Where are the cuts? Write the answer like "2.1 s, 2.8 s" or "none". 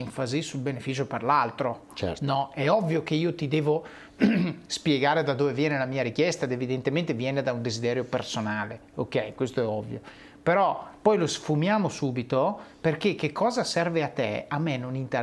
none